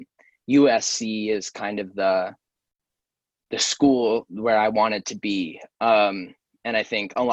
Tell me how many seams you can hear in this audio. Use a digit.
0